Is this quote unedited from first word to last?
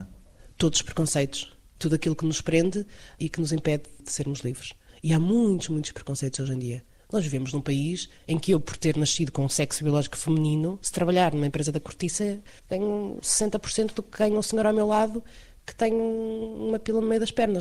no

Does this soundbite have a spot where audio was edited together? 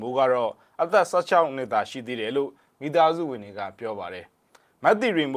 no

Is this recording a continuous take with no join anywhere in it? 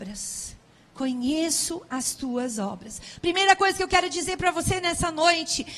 yes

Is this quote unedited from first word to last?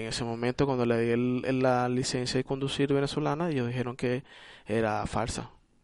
yes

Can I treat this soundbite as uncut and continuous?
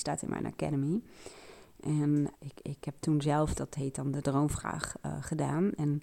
no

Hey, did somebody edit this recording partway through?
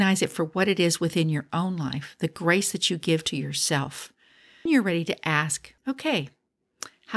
yes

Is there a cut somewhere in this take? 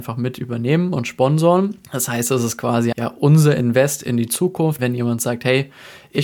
yes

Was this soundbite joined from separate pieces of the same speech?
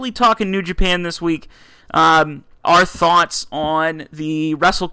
yes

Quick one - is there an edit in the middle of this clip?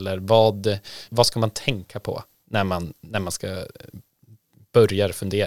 yes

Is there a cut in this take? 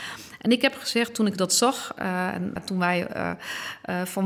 yes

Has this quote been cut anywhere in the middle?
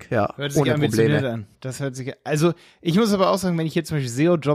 yes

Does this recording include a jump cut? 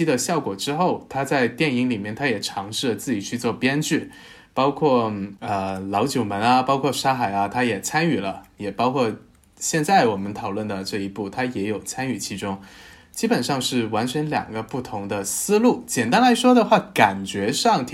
no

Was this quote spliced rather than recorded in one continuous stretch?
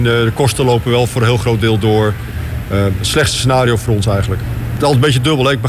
no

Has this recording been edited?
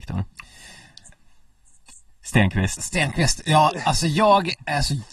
no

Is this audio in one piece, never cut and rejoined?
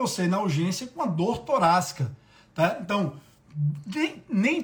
yes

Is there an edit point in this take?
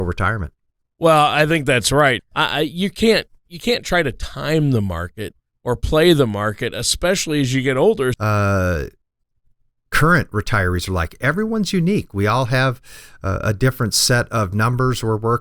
yes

